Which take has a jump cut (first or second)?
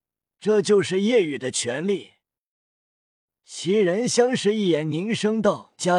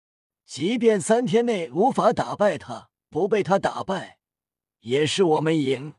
second